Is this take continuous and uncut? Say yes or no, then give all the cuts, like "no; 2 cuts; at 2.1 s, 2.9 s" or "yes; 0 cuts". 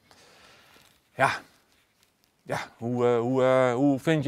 yes; 0 cuts